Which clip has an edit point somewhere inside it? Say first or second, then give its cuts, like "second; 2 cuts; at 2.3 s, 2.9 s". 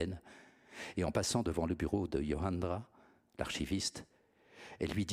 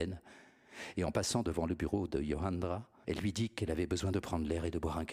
second; 1 cut; at 3.0 s